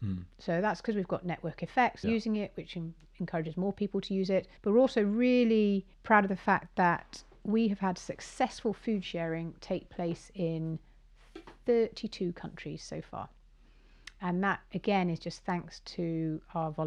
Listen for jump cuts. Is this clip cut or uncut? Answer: cut